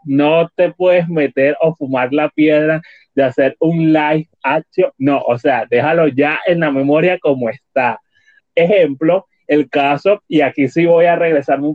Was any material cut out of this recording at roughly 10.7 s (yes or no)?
no